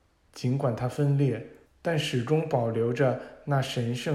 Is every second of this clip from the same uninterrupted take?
no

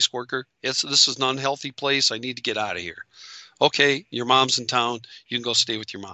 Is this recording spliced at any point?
no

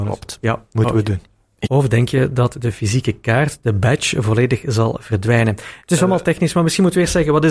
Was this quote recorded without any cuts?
no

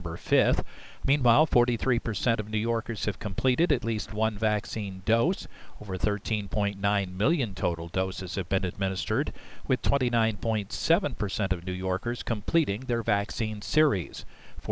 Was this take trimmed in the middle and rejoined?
yes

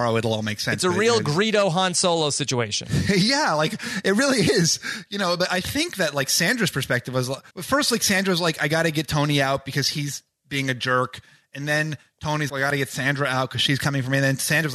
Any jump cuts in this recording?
yes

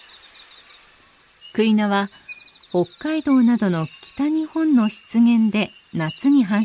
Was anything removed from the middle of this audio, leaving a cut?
no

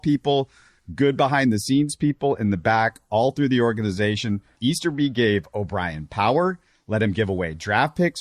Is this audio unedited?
no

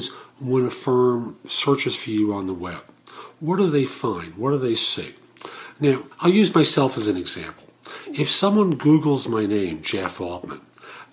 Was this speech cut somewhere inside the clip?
yes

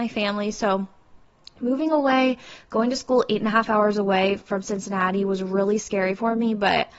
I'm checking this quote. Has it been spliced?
no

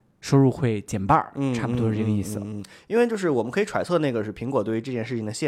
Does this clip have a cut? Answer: no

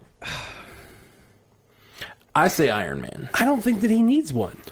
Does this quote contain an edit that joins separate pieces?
no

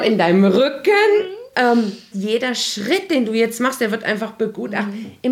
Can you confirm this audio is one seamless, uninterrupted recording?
no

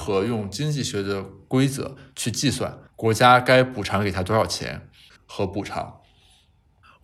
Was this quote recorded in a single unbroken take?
no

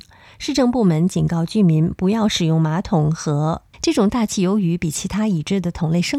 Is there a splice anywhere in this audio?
yes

